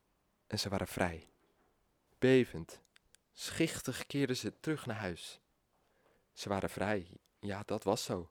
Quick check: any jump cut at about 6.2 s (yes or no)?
yes